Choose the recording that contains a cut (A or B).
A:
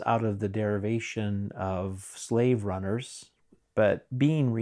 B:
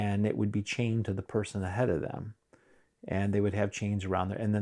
A